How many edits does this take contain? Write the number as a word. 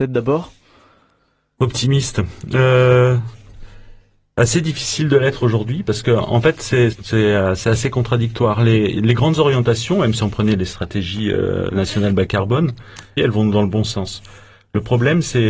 two